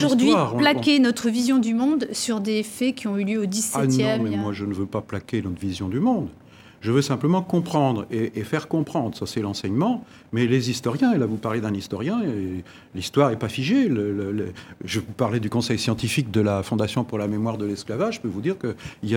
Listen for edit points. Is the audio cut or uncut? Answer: uncut